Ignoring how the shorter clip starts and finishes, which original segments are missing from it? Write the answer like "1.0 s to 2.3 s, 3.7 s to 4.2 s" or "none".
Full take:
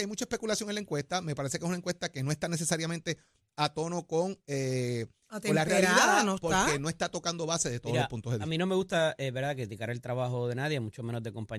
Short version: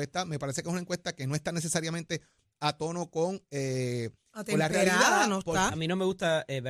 6.6 s to 8.4 s